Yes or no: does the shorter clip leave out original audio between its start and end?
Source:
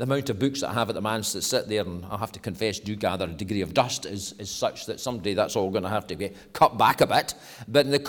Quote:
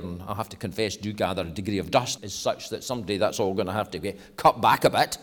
yes